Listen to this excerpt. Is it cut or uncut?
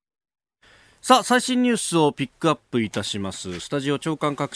uncut